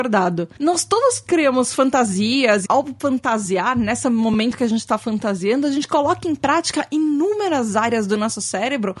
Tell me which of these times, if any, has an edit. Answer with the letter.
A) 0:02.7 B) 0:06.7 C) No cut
A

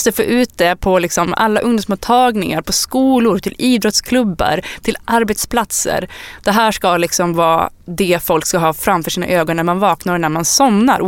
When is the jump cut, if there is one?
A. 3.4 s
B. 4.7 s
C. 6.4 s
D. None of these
D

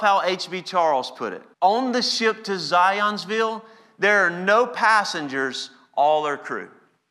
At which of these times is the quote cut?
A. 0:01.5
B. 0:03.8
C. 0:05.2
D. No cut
A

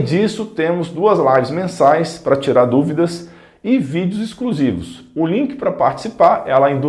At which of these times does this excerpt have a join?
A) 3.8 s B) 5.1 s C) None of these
C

